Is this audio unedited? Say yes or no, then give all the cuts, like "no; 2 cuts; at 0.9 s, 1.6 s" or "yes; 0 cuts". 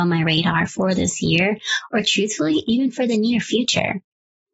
yes; 0 cuts